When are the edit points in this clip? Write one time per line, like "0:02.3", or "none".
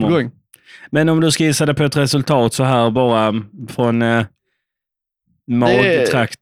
none